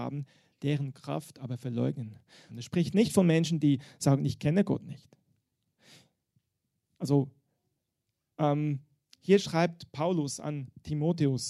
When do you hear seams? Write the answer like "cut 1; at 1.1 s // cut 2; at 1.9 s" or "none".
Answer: cut 1; at 2.5 s